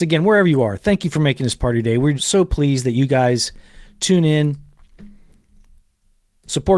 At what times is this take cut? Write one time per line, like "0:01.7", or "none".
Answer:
0:02.2